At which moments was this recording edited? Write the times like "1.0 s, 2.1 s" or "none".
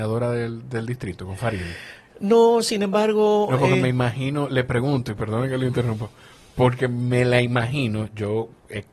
none